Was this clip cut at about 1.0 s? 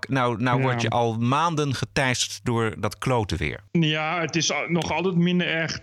no; 1 cut; at 3.7 s

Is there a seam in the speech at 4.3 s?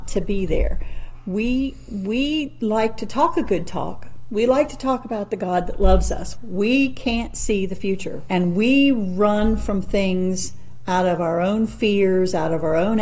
no; 2 cuts; at 6.4 s, 8.3 s

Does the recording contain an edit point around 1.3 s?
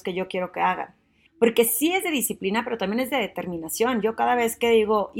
yes; 1 cut; at 1.3 s

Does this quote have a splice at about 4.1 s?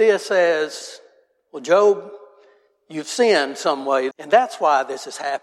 yes; 1 cut; at 4.1 s

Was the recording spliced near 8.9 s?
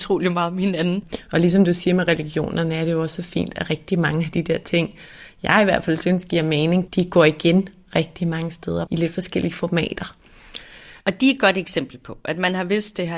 yes; 2 cuts; at 6.9 s, 8.9 s

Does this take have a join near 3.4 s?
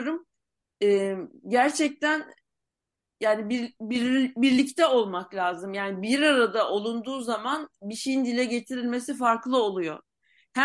no; 0 cuts

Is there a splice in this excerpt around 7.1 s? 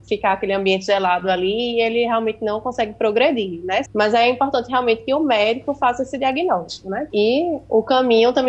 yes; 2 cuts; at 3.9 s, 7.1 s

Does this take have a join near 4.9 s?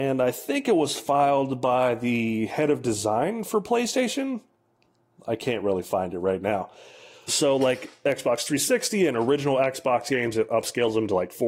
no; 1 cut; at 7.3 s

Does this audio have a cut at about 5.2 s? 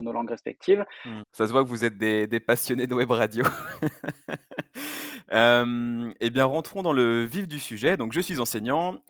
no; 1 cut; at 1.2 s

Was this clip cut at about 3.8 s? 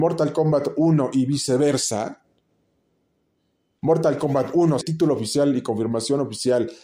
yes; 2 cuts; at 3.8 s, 4.8 s

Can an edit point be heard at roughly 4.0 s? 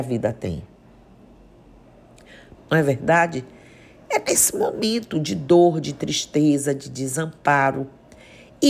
no; 1 cut; at 2.5 s

